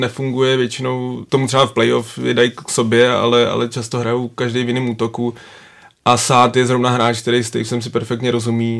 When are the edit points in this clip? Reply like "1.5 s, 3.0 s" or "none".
none